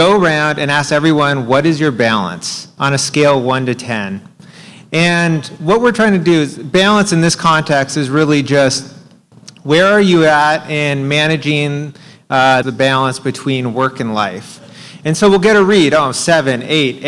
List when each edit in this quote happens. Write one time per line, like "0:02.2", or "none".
0:12.6